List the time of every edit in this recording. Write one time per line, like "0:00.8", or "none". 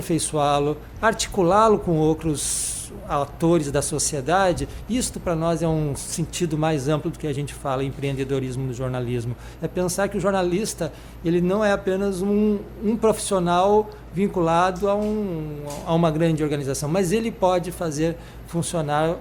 none